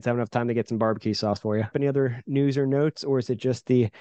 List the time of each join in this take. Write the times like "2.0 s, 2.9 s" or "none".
1.7 s